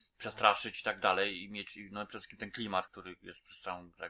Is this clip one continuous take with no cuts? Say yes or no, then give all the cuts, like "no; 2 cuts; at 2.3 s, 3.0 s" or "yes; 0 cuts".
no; 1 cut; at 2.9 s